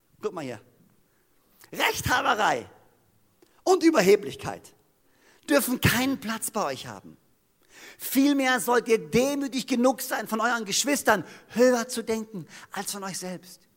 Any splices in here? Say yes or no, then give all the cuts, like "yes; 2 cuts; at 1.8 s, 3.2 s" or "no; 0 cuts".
no; 0 cuts